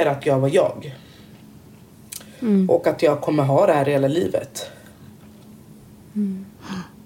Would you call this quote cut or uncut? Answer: uncut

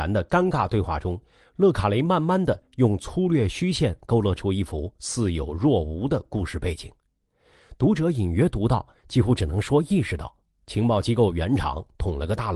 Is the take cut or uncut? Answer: uncut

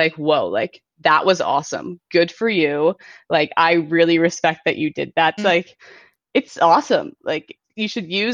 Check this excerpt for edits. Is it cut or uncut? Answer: cut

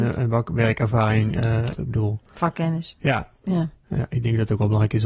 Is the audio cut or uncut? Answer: cut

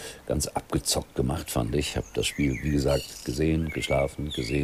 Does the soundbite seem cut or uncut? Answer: uncut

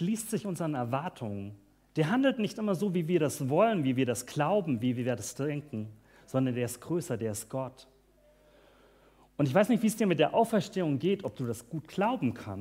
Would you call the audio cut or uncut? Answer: uncut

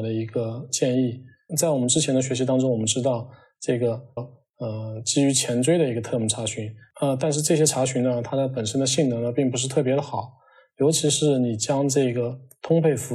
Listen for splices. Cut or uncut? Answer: cut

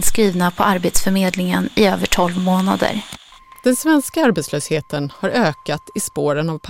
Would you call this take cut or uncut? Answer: uncut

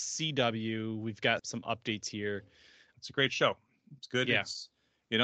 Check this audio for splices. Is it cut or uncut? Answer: cut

